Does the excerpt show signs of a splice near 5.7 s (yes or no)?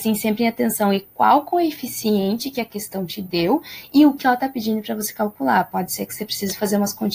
no